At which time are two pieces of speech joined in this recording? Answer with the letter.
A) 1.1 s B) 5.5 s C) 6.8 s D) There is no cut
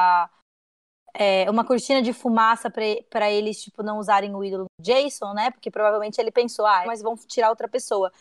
C